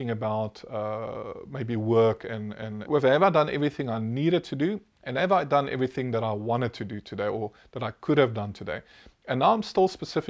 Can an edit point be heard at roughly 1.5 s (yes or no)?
no